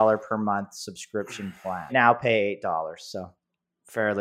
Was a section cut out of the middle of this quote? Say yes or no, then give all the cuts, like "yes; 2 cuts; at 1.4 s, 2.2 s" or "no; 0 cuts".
yes; 1 cut; at 1.9 s